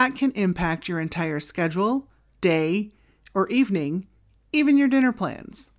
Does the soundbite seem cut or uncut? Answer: uncut